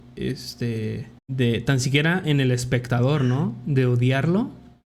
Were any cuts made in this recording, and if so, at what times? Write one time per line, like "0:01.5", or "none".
0:01.2